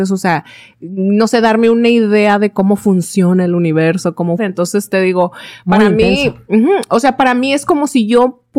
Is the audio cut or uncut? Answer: cut